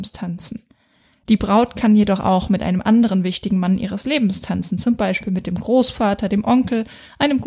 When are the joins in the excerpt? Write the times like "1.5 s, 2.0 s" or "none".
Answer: none